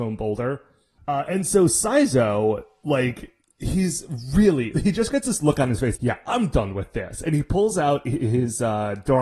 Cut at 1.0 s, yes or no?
yes